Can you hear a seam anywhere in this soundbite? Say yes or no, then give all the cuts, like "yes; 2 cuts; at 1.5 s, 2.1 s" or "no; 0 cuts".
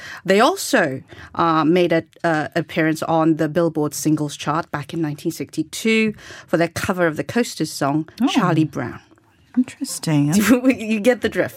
yes; 1 cut; at 10.3 s